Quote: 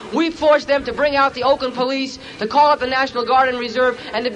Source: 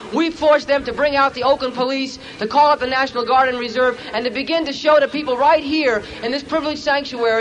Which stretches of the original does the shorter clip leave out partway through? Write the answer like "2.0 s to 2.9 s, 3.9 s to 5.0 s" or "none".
none